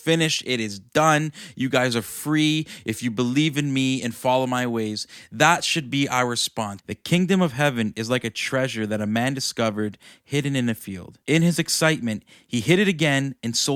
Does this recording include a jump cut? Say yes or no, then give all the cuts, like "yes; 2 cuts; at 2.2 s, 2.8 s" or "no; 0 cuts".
yes; 2 cuts; at 6.8 s, 11.2 s